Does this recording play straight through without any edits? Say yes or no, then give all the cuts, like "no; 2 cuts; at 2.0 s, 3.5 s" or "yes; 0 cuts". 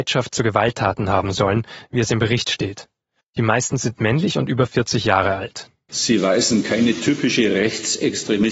no; 2 cuts; at 3.2 s, 5.9 s